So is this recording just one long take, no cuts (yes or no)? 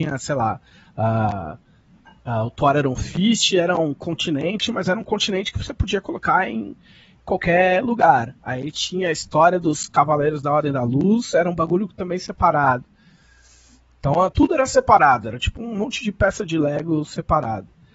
no